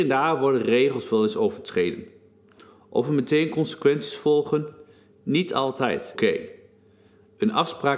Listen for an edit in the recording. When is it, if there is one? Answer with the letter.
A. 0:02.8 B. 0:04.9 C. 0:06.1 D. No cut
C